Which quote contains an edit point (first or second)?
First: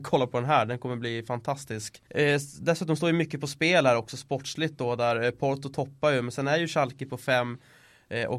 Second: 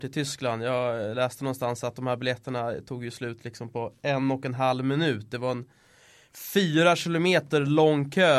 first